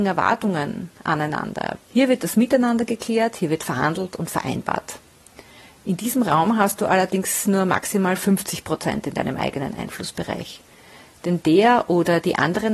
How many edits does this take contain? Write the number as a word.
one